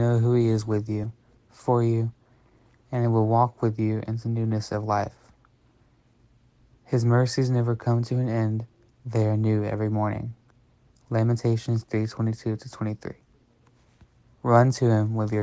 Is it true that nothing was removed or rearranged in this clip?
no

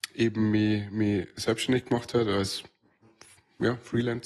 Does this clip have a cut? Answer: no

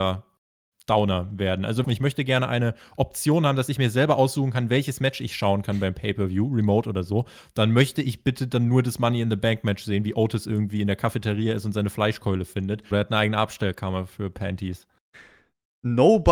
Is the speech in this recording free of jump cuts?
no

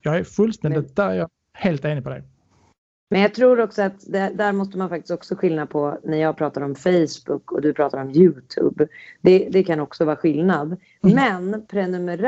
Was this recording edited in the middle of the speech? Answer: no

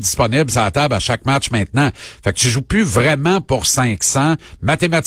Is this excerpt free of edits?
yes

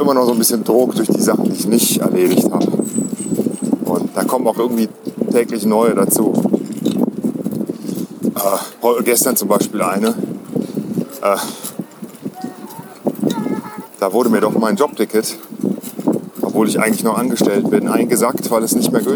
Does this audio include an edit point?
yes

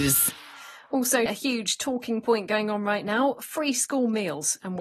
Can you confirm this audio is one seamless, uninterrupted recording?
no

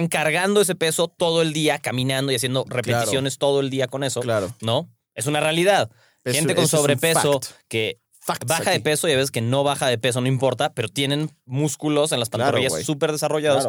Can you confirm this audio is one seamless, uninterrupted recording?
no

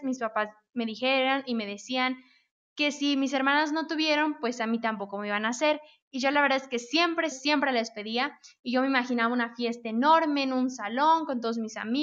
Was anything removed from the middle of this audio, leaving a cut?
yes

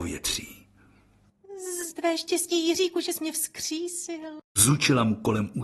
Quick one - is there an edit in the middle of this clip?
yes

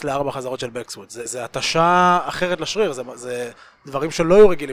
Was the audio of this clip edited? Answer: no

